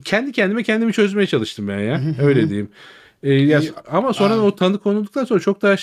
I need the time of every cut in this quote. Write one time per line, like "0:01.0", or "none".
none